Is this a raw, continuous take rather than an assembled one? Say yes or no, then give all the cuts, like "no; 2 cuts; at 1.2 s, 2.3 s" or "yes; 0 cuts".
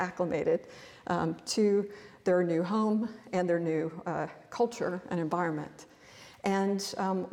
yes; 0 cuts